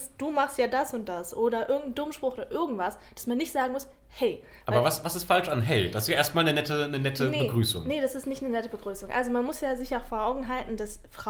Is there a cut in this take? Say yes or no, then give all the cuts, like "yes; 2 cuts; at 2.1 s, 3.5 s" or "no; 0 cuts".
no; 0 cuts